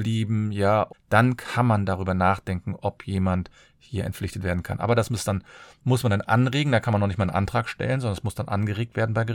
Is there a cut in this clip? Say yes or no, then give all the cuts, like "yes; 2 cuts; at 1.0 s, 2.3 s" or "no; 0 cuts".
yes; 1 cut; at 0.9 s